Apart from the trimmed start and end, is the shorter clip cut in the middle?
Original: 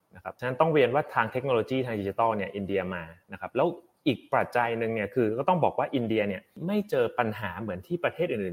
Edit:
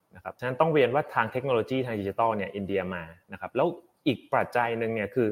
no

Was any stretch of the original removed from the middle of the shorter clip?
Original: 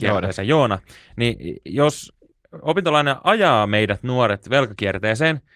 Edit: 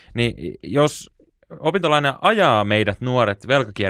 no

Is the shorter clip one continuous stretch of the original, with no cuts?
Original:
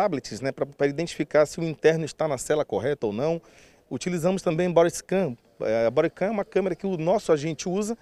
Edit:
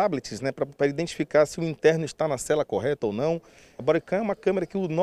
no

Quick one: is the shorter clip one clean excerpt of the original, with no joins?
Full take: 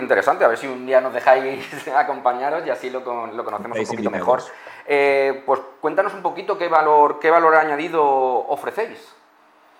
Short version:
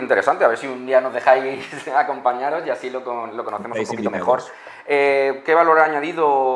no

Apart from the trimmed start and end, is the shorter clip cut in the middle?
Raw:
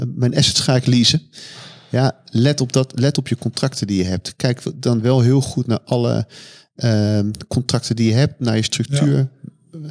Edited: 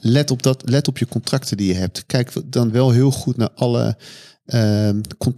no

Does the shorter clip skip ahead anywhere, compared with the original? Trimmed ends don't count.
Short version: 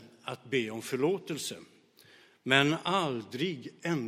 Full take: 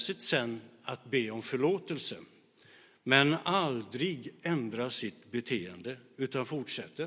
no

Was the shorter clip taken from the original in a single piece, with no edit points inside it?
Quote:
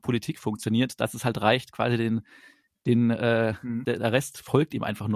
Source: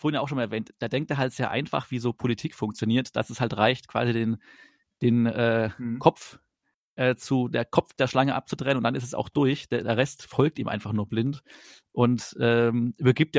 no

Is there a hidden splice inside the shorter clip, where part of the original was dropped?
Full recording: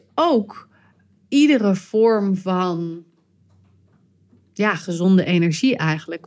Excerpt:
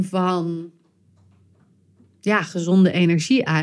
no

